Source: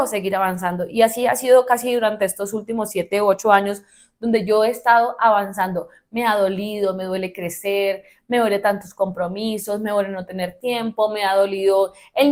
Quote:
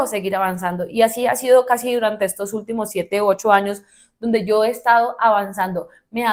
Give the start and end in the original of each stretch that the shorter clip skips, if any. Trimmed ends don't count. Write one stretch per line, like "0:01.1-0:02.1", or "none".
none